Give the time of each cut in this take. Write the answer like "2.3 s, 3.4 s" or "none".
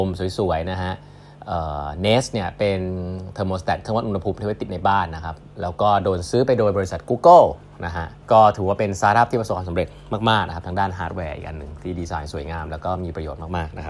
8.2 s